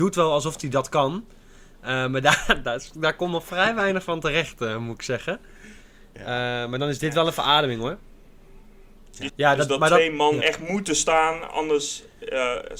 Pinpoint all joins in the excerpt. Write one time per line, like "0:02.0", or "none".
0:09.3
0:10.4